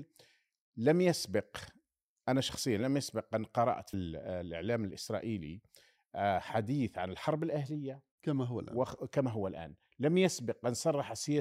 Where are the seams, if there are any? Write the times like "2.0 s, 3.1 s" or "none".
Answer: 3.9 s

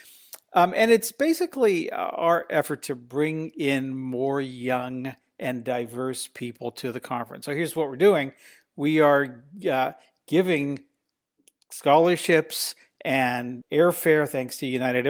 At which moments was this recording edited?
13.6 s

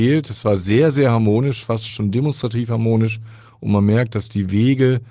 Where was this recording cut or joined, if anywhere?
none

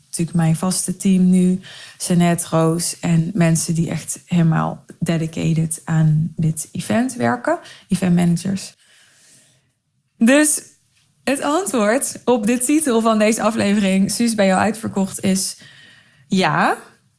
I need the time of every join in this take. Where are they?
none

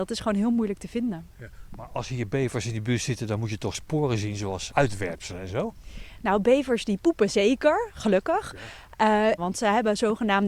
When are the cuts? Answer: 4.7 s, 9.4 s

